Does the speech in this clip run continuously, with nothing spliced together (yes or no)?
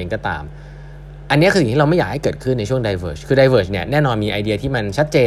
yes